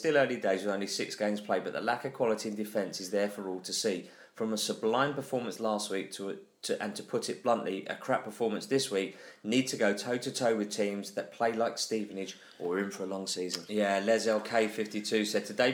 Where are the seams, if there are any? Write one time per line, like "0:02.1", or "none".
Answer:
0:13.7